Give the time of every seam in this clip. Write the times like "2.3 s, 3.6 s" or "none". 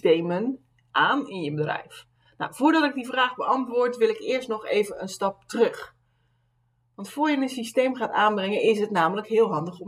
none